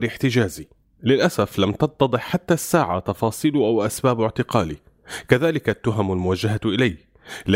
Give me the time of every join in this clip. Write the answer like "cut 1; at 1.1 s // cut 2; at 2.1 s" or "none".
none